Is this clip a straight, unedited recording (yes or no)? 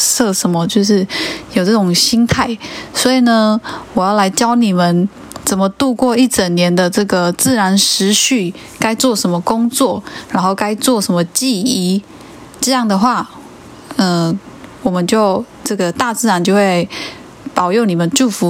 yes